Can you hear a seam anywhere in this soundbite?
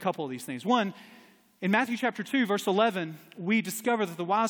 no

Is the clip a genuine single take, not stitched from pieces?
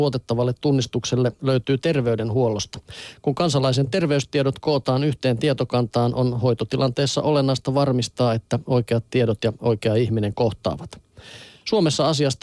yes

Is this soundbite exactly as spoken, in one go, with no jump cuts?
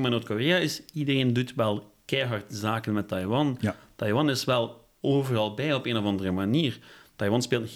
yes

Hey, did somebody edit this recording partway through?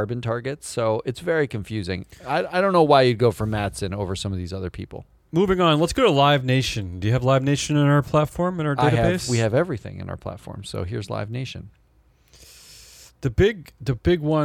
no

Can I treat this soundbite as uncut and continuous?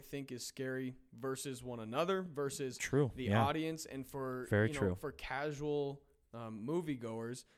yes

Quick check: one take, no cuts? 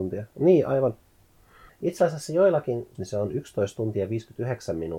no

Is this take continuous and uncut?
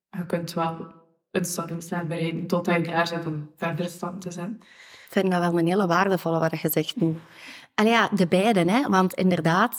yes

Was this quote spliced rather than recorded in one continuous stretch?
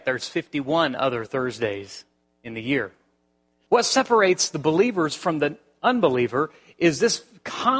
yes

